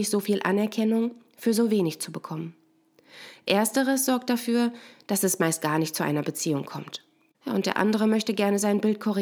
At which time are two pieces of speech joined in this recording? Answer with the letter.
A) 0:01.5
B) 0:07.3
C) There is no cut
B